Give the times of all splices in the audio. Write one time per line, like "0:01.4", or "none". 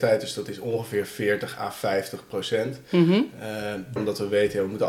0:04.0